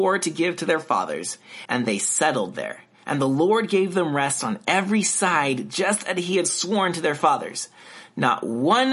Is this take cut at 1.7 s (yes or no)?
yes